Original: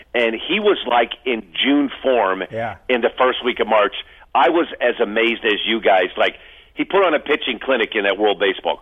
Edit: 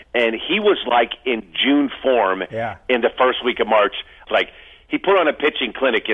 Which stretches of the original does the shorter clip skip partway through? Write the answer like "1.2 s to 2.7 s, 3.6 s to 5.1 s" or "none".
4.3 s to 6.1 s